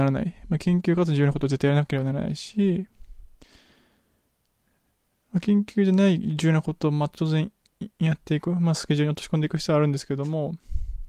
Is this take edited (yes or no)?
no